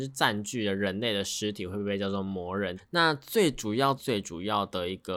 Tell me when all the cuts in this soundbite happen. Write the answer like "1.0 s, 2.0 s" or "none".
2.8 s, 4.0 s